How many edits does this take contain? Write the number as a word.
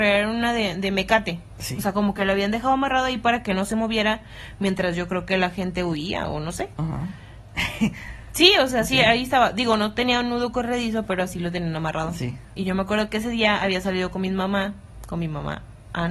zero